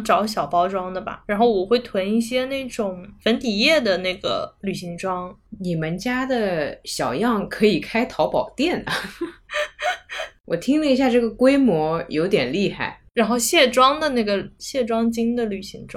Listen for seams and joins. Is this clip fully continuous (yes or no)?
yes